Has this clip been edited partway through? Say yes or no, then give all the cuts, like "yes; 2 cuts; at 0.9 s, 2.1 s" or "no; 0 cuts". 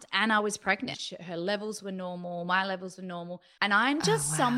yes; 2 cuts; at 0.9 s, 3.6 s